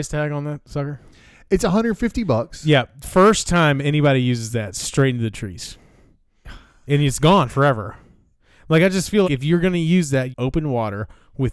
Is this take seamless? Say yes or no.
no